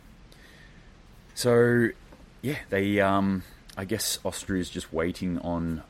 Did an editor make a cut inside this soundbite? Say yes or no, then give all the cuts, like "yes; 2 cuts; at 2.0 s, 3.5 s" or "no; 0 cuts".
no; 0 cuts